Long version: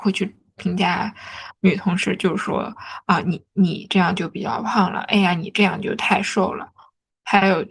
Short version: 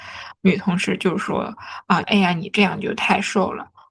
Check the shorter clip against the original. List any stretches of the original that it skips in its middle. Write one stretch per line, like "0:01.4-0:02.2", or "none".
0:03.2-0:05.0